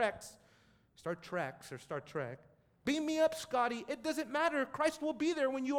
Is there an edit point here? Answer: no; 0 cuts

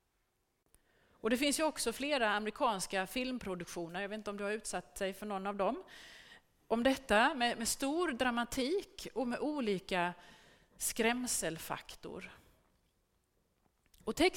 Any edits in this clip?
no; 0 cuts

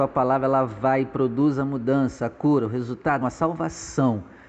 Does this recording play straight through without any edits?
no; 1 cut; at 3.2 s

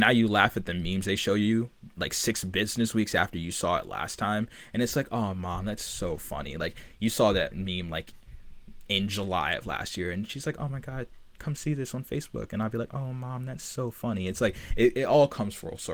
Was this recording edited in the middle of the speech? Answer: no; 0 cuts

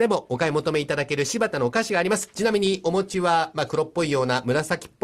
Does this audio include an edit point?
yes; 1 cut; at 2.3 s

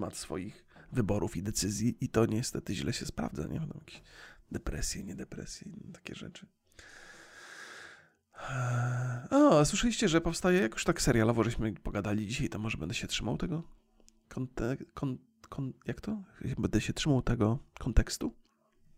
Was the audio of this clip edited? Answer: no; 0 cuts

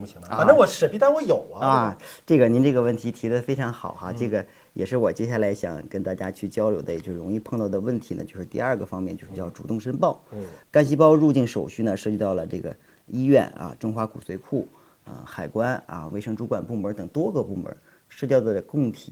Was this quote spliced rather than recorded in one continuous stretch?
no; 0 cuts

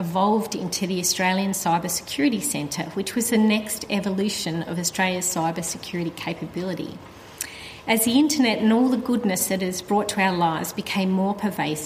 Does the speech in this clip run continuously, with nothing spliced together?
yes; 0 cuts

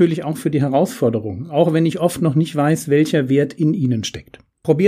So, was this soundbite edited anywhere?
no; 0 cuts

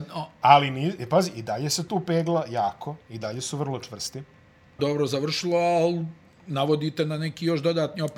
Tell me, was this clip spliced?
yes; 1 cut; at 4.8 s

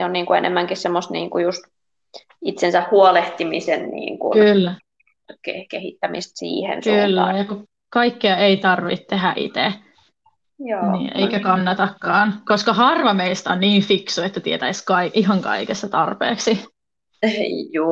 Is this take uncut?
yes; 0 cuts

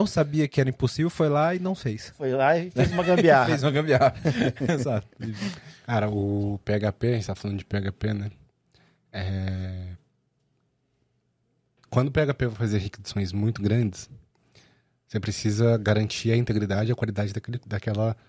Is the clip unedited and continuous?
yes; 0 cuts

